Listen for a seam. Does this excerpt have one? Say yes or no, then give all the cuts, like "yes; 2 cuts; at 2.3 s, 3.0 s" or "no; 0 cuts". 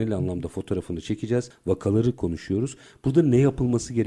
no; 0 cuts